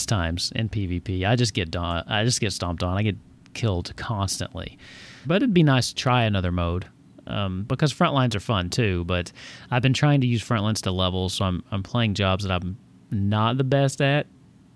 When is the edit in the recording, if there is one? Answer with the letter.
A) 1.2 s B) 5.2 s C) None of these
B